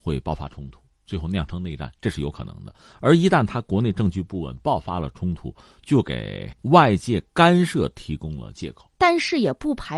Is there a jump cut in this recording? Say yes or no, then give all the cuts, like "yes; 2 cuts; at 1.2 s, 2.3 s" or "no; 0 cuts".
yes; 2 cuts; at 6.6 s, 8.9 s